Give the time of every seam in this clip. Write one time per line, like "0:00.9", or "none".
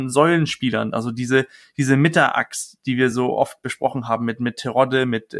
none